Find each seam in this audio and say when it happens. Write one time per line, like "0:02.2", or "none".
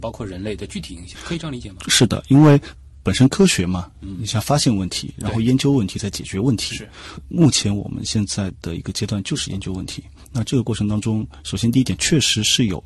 none